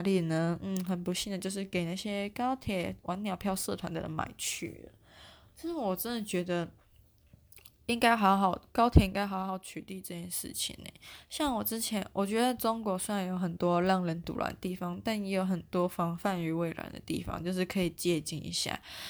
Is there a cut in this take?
no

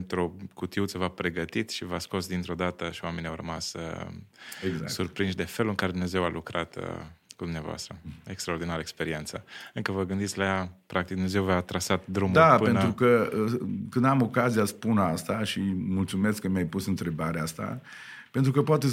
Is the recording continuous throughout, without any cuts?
yes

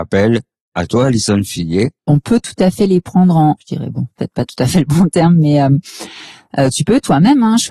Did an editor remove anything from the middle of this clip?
yes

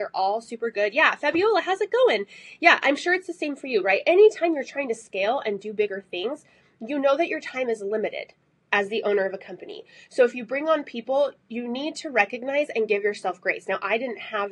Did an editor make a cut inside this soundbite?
no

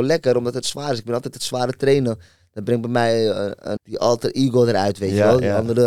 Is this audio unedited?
no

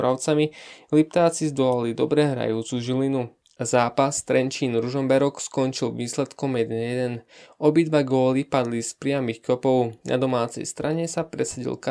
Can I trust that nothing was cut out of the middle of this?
yes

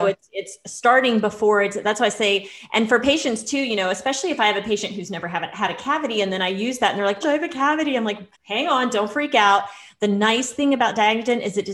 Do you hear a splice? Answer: yes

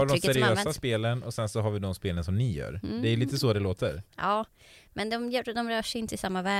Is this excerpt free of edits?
yes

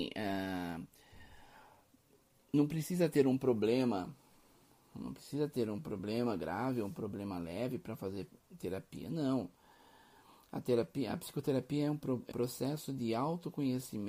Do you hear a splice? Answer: yes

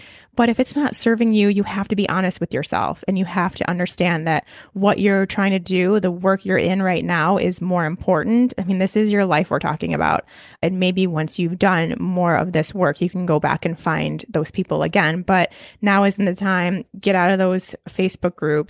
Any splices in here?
no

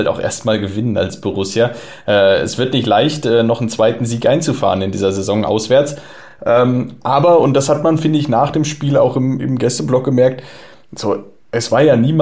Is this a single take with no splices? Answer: yes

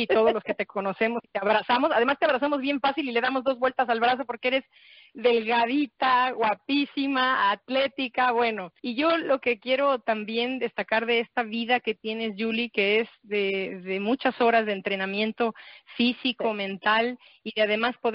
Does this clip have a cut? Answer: yes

